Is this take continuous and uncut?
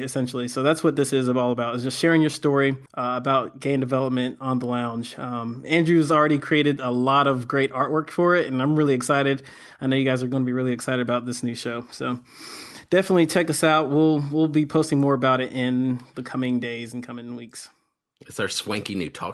no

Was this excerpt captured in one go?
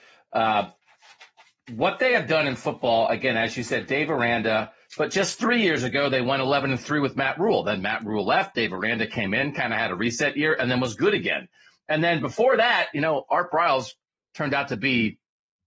no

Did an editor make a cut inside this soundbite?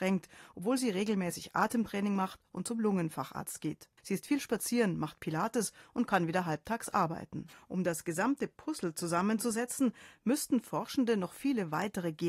yes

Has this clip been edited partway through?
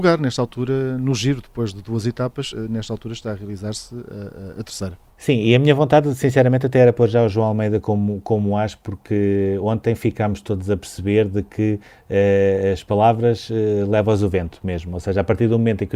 no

